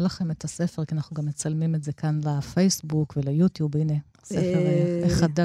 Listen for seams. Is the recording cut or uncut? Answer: uncut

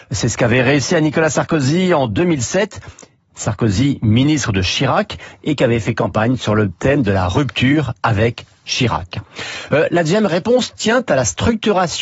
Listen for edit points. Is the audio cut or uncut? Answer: uncut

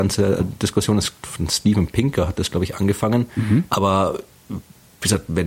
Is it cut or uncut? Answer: cut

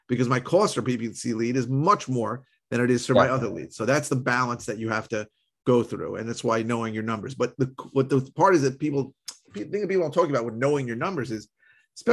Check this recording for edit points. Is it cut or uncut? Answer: uncut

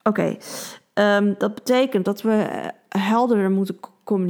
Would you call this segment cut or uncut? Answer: uncut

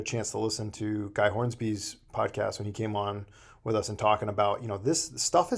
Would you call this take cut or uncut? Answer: uncut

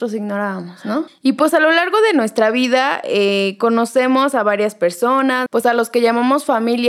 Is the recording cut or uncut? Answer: cut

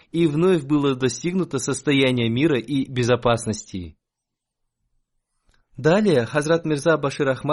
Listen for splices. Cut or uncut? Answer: uncut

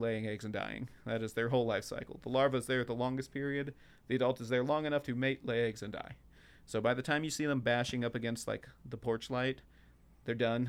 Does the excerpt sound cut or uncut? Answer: uncut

